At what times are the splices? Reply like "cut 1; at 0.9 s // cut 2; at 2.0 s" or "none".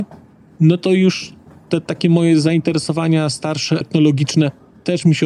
cut 1; at 3.8 s